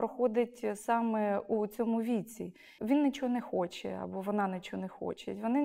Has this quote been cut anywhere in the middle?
yes; 1 cut; at 2.8 s

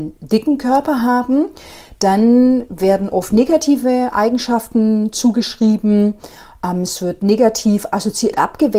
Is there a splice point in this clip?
no; 0 cuts

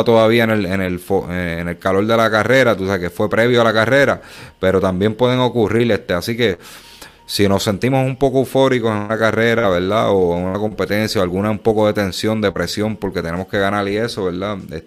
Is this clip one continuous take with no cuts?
yes; 0 cuts

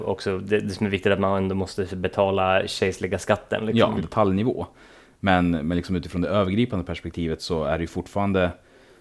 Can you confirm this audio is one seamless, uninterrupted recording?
no; 1 cut; at 4.0 s

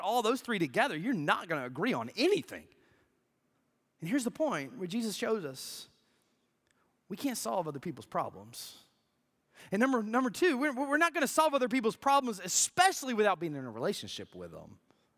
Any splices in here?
no; 0 cuts

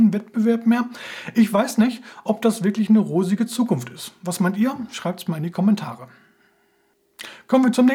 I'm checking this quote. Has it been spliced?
no; 0 cuts

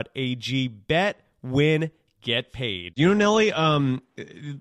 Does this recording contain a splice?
no; 0 cuts

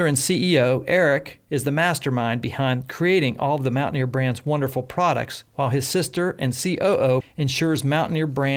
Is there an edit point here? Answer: yes; 2 cuts; at 5.5 s, 7.2 s

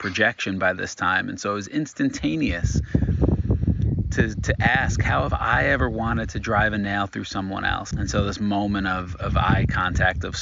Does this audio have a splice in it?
yes; 1 cut; at 7.9 s

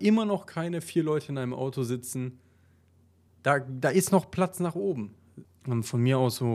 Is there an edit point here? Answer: yes; 2 cuts; at 3.3 s, 5.4 s

